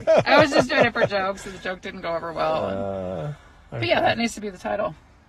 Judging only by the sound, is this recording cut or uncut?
uncut